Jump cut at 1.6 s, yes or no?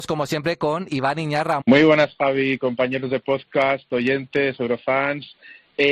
yes